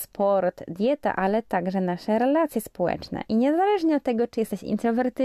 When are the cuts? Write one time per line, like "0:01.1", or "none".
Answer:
none